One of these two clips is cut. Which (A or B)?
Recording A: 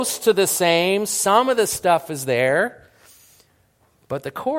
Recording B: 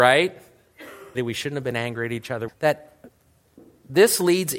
B